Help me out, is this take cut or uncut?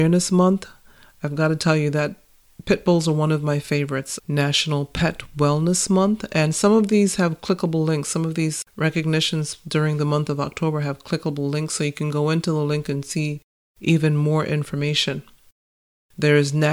cut